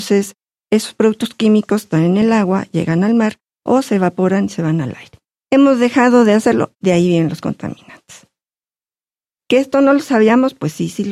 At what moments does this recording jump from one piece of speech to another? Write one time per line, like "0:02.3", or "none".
0:05.4
0:06.7